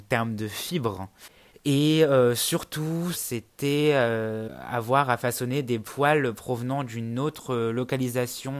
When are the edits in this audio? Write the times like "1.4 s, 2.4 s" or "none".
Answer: 1.5 s, 3.1 s

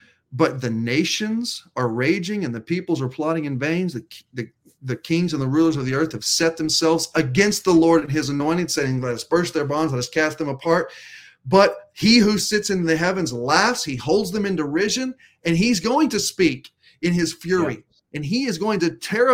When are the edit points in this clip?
none

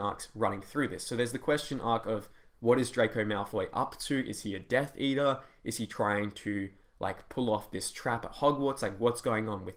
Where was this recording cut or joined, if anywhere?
none

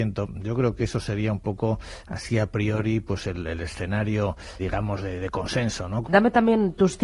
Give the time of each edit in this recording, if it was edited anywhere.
4.6 s, 6.0 s

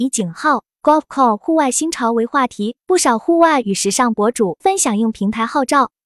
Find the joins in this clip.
2.8 s, 4.6 s

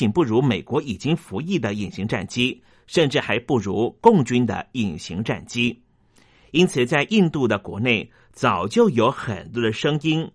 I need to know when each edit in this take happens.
none

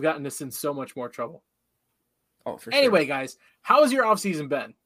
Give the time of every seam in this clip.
none

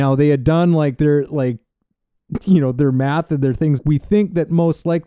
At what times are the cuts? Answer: 3.8 s

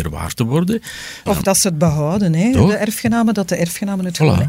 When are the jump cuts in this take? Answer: 1.3 s

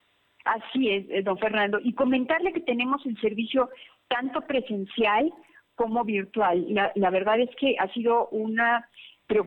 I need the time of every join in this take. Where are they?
none

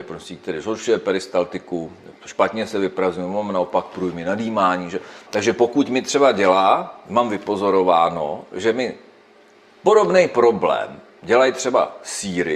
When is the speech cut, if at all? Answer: 5.3 s

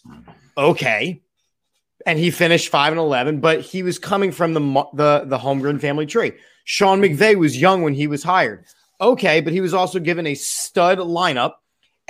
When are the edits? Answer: none

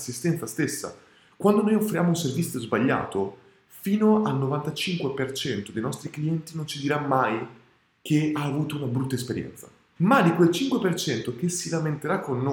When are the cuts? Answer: 10.0 s

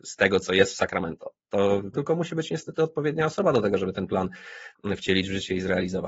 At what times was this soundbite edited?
1.9 s

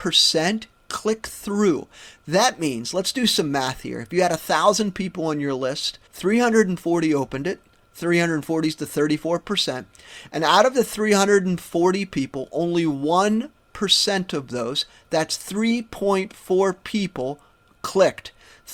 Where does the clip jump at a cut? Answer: 6.1 s

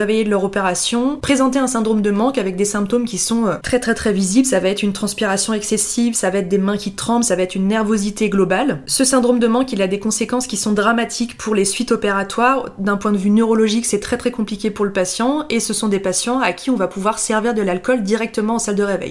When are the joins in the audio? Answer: none

